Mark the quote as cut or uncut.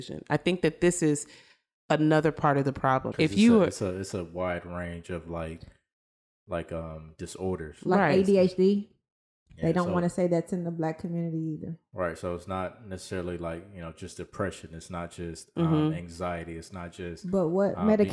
cut